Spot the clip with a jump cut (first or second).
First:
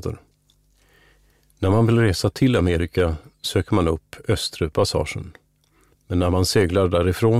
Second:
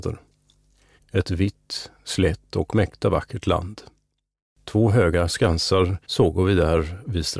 second